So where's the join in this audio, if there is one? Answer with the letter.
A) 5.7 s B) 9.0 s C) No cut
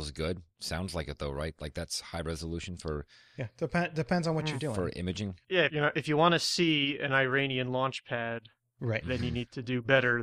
A